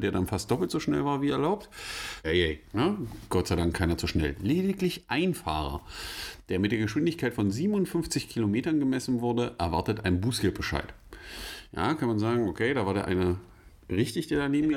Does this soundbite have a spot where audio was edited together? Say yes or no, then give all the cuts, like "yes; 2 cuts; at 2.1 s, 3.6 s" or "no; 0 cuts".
yes; 1 cut; at 2.2 s